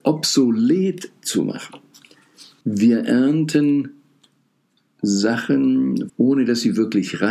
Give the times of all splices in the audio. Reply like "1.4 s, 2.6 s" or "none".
2.6 s, 6.1 s